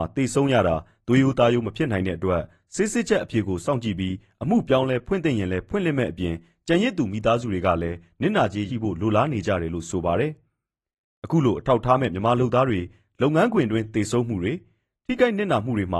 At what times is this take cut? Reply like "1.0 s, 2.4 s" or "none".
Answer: 8.7 s